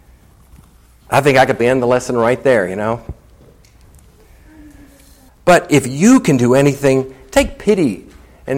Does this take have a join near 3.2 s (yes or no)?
no